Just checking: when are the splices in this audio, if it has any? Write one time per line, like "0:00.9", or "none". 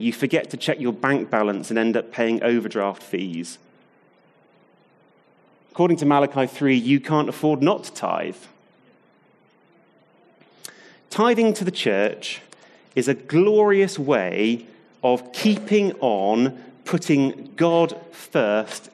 none